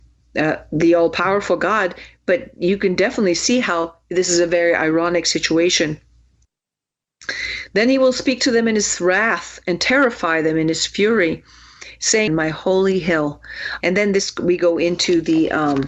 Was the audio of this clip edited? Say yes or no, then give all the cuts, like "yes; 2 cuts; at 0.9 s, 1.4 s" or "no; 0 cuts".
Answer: yes; 2 cuts; at 12.3 s, 13.8 s